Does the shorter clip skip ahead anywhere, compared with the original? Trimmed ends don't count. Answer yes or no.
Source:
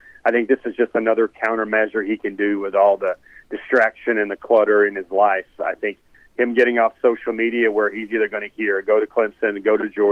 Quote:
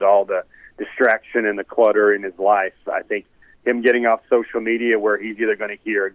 no